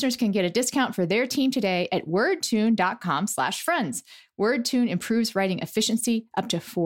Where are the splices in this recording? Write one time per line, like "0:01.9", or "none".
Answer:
none